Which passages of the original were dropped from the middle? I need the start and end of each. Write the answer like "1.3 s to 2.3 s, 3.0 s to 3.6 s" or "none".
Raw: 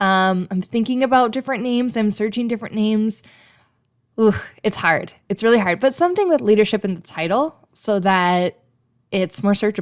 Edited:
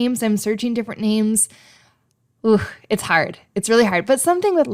none

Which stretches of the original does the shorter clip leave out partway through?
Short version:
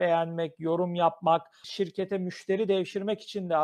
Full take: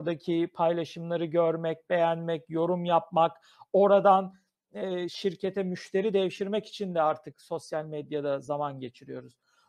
3.5 s to 5.1 s

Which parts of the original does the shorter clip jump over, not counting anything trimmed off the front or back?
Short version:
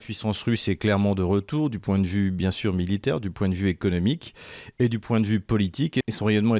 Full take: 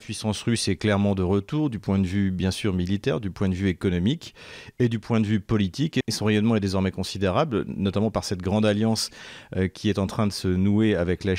none

